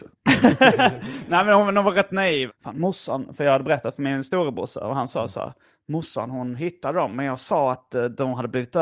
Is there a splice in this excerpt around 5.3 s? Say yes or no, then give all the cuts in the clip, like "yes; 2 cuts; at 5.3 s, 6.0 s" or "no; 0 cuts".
no; 1 cut; at 2.5 s